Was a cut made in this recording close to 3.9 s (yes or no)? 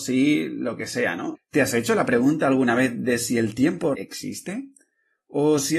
yes